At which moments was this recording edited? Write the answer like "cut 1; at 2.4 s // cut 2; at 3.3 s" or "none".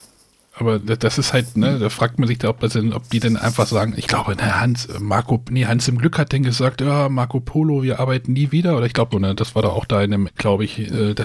cut 1; at 9.1 s // cut 2; at 10.3 s